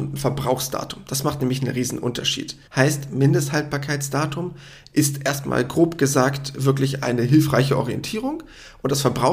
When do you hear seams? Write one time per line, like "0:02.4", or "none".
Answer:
0:02.7